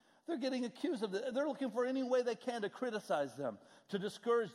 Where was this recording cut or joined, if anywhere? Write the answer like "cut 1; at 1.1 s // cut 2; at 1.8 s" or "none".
none